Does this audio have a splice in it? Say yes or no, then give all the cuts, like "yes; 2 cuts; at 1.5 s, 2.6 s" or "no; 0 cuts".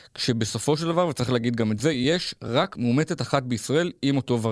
no; 0 cuts